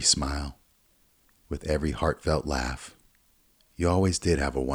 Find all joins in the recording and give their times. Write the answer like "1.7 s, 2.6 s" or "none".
1.4 s